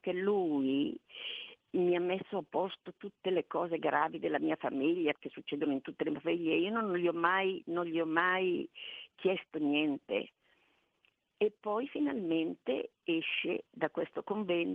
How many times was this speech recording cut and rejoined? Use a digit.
1